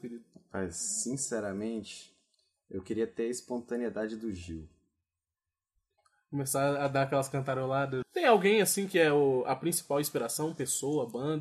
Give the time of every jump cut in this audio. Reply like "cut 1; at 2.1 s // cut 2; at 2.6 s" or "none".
cut 1; at 8.0 s